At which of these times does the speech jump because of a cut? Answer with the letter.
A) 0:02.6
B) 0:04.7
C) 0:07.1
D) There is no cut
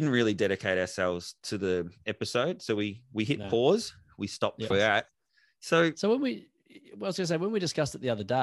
B